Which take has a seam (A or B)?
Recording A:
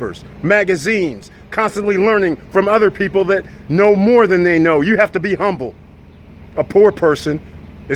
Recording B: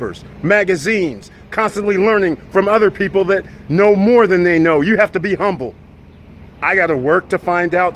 B